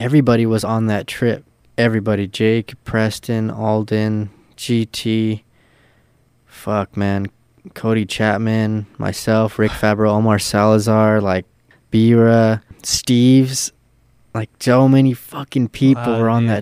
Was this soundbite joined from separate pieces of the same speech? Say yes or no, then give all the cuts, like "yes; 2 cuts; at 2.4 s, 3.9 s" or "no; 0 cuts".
no; 0 cuts